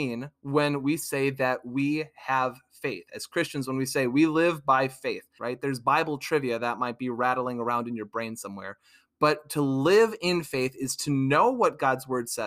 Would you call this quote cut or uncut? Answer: cut